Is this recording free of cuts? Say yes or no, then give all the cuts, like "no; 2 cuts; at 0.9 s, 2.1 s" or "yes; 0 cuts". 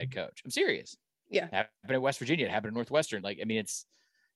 yes; 0 cuts